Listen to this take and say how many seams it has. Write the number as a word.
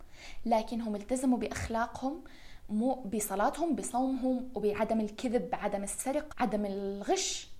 one